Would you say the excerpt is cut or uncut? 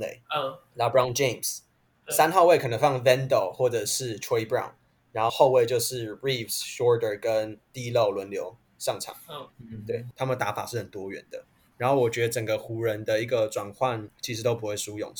cut